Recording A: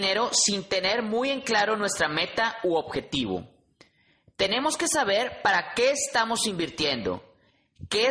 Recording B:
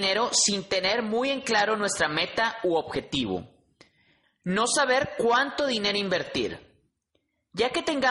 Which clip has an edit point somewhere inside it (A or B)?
B